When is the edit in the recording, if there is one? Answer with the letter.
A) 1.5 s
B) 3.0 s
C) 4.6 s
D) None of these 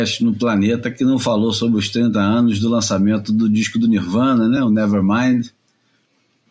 D